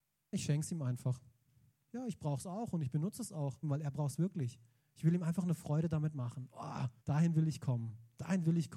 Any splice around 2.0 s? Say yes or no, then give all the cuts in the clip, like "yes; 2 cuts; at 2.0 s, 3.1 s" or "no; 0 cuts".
no; 2 cuts; at 3.6 s, 7.0 s